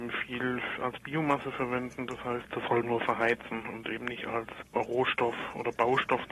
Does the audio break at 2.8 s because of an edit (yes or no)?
yes